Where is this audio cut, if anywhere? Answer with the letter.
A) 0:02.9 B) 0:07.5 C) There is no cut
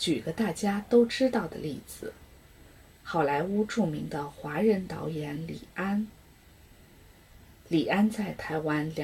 C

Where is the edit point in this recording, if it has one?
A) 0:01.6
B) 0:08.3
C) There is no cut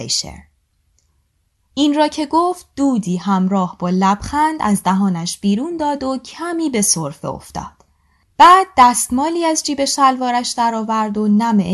A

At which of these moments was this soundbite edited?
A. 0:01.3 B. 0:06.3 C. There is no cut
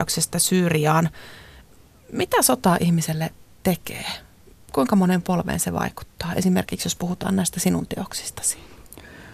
C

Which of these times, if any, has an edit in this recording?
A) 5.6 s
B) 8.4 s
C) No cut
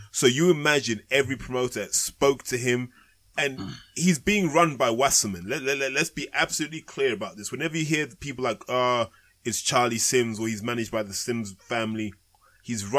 C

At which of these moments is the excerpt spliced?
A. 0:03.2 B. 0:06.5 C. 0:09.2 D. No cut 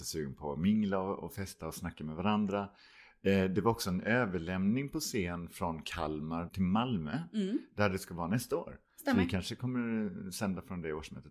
B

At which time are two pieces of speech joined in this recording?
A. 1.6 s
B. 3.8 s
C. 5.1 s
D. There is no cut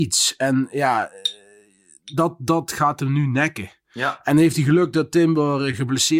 D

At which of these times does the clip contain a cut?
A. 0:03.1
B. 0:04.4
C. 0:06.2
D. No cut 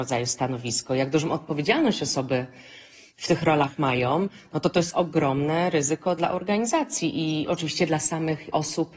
C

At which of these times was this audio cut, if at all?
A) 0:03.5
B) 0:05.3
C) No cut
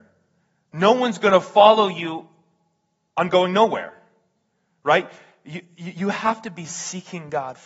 C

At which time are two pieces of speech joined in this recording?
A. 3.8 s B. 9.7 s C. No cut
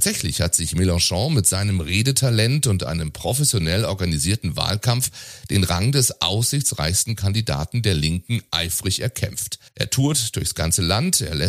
B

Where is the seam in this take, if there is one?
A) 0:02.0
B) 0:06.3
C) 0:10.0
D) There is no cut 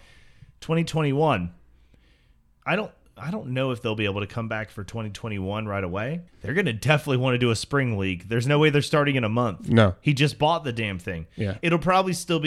B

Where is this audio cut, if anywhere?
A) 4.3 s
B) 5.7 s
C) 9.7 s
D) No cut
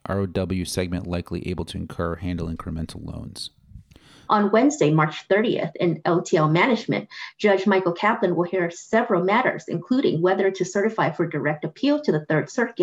A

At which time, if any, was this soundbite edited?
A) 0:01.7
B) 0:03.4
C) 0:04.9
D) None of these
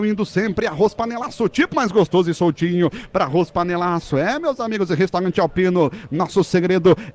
A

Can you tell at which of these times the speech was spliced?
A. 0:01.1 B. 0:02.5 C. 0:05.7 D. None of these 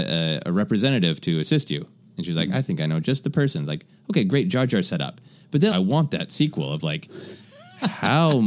C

